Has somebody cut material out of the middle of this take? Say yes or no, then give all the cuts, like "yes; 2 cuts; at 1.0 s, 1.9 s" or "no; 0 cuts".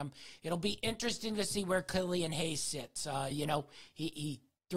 yes; 1 cut; at 3.3 s